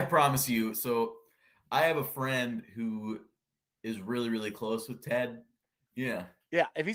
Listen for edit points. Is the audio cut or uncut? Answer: cut